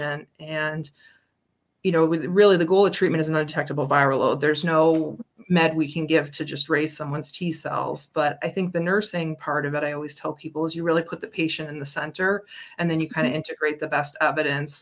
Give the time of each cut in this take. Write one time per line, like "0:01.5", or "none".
none